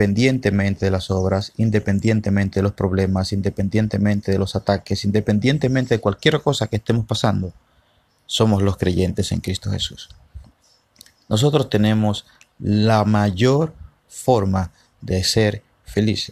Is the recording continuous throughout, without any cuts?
yes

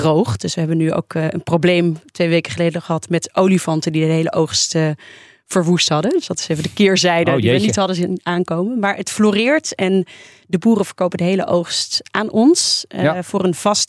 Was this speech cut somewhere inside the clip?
no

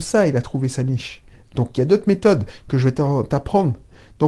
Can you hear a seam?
no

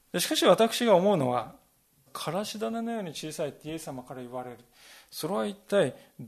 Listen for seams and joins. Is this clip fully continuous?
no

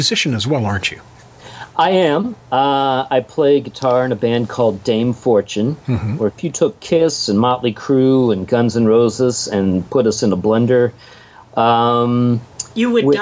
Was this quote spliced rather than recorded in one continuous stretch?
yes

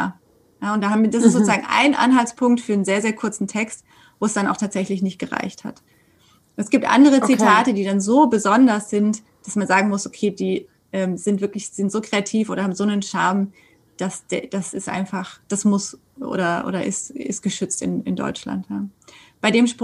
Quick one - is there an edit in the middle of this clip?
no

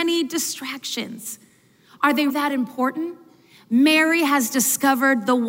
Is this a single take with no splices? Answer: no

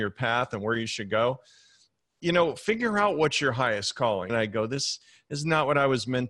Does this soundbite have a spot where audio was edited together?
yes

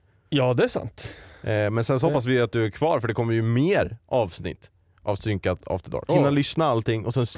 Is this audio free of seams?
no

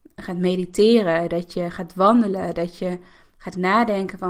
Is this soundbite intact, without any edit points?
yes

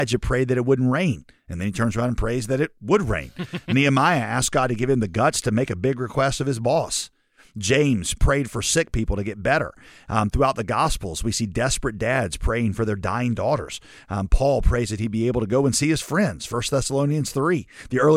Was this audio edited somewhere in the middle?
no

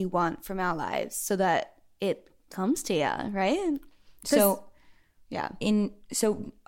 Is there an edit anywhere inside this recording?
no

